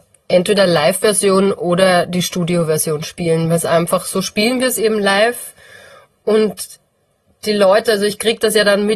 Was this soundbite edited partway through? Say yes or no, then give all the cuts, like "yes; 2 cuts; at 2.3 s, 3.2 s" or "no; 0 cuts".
no; 0 cuts